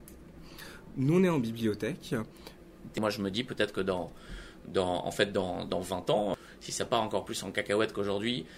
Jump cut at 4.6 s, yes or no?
no